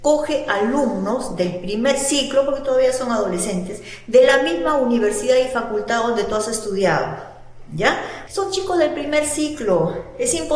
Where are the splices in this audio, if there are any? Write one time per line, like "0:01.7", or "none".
0:08.3